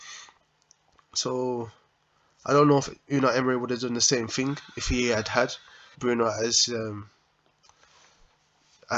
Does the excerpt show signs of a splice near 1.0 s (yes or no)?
no